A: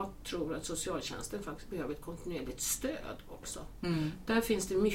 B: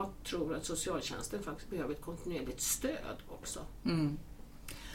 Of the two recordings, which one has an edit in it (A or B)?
A